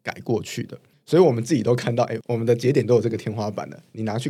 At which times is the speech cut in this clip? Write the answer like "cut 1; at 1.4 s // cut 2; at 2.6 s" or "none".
cut 1; at 0.9 s